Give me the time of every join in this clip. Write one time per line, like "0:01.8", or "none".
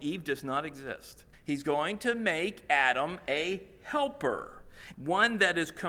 0:01.3
0:04.9